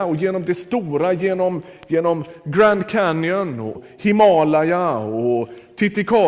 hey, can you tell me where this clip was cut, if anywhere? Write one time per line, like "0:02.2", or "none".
0:03.7

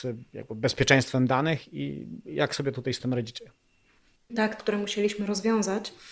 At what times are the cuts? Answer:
0:04.6

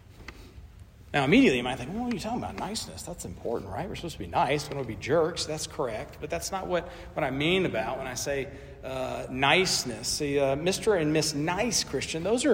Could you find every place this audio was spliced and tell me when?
none

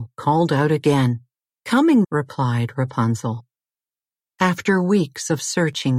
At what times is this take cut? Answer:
0:02.0

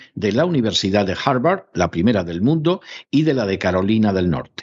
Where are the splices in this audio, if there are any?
none

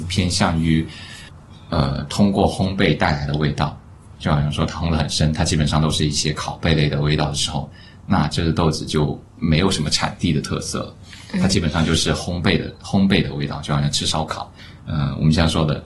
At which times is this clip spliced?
none

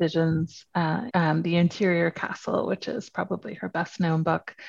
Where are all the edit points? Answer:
0:01.1

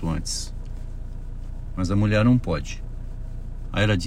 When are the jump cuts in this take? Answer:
0:01.7

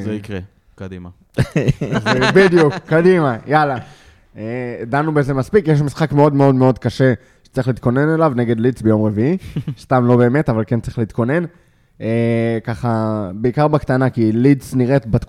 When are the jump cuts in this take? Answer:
none

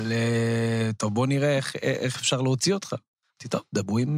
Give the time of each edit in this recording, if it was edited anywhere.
none

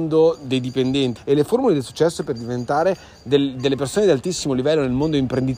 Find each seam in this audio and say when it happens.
0:01.2

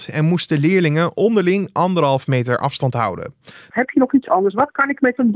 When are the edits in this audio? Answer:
0:03.7

